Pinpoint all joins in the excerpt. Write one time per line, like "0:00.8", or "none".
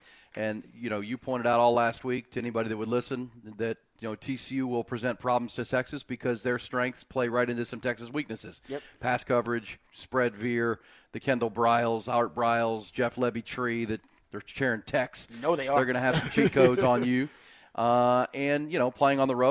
0:09.9